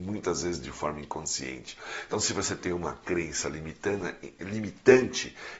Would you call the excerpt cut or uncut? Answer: uncut